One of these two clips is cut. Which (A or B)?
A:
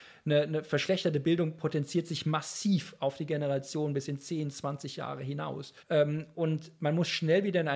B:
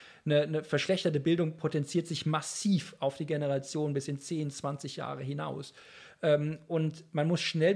A